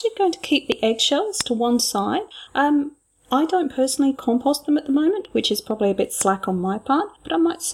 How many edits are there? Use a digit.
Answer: 0